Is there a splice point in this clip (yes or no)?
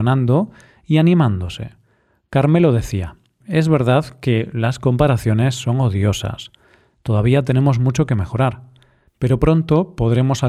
yes